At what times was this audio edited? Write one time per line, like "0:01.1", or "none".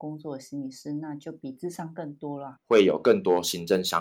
0:02.5